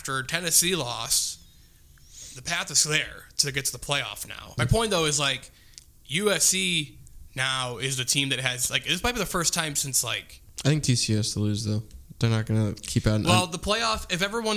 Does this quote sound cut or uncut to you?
cut